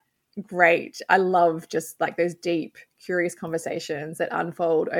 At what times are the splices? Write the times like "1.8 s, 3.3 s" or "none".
none